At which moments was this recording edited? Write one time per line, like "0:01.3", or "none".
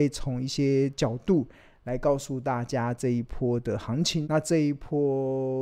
0:04.2